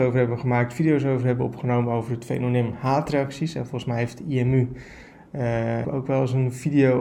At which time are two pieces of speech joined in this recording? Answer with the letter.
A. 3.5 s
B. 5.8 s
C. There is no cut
B